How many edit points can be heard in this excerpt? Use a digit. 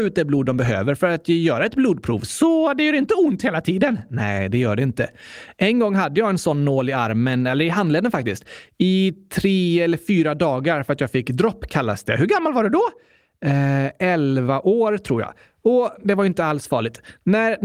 0